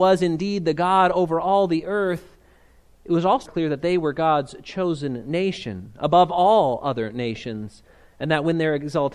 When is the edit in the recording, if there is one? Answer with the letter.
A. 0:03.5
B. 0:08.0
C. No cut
A